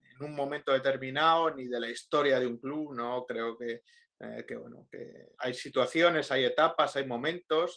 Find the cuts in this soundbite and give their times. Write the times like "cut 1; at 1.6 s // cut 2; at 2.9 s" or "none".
cut 1; at 5.3 s